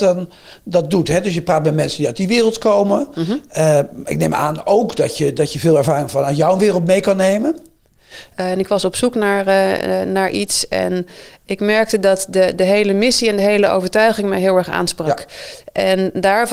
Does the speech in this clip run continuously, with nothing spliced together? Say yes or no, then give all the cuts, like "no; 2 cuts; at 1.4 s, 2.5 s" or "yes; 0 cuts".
no; 1 cut; at 8.3 s